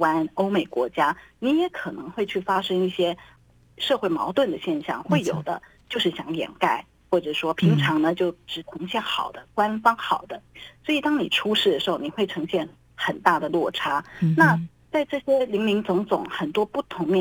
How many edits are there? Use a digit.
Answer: 1